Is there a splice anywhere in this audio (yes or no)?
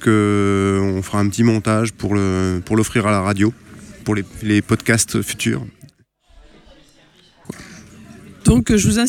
yes